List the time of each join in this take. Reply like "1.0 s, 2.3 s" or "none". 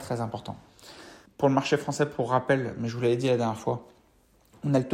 1.3 s